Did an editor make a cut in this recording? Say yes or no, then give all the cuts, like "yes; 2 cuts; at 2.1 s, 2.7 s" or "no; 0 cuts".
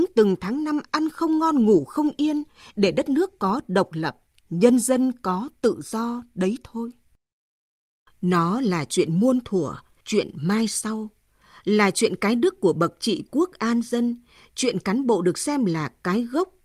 yes; 1 cut; at 10.0 s